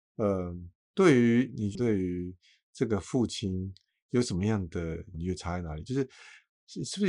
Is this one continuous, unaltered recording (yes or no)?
no